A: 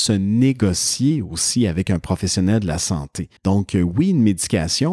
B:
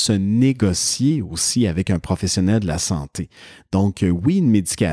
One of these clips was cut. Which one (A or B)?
A